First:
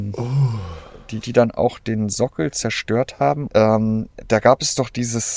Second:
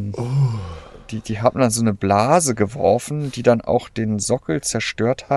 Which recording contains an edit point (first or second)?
first